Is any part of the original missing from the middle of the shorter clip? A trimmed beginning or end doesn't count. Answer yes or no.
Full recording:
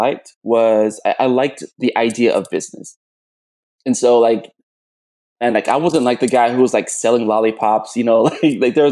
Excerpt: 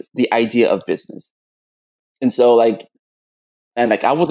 no